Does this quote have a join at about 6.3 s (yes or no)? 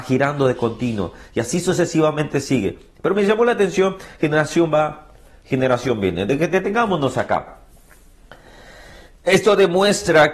no